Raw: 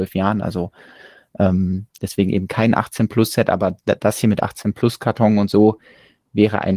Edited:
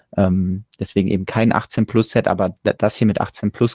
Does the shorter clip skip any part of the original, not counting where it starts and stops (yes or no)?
no